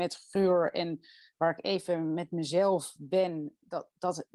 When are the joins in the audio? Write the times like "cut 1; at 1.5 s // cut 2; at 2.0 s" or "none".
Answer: none

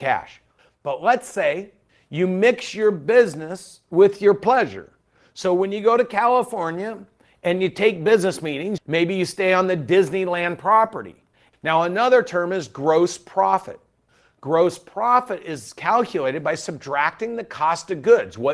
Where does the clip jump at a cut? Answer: cut 1; at 8.8 s // cut 2; at 11.5 s

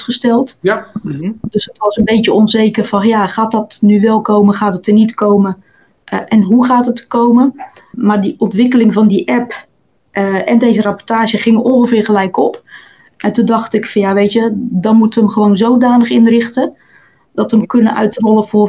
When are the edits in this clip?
none

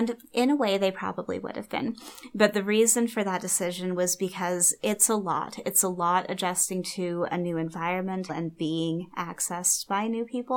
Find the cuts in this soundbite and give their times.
cut 1; at 8.3 s

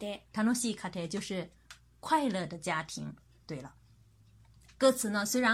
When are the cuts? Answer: cut 1; at 3.4 s

